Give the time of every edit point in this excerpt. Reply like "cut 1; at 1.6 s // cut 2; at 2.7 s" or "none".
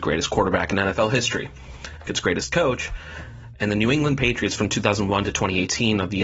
cut 1; at 2.1 s